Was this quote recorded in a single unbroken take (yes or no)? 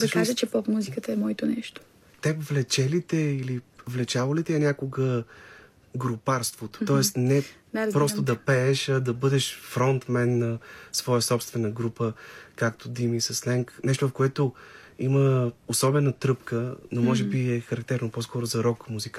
no